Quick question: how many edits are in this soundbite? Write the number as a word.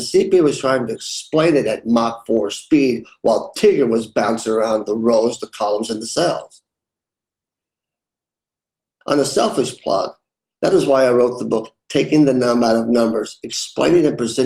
one